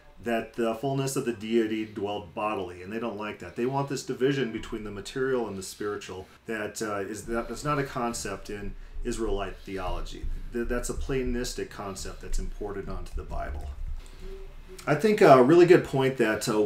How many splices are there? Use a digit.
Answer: 1